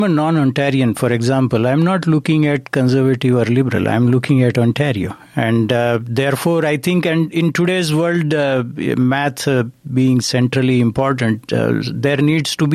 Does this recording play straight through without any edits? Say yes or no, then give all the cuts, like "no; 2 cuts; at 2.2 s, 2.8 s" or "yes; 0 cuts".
yes; 0 cuts